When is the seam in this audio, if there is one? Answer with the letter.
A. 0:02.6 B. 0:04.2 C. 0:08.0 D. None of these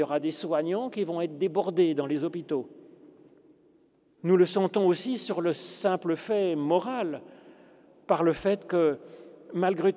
B